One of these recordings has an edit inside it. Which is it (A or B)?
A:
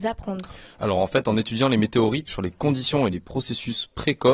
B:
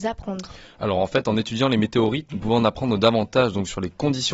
A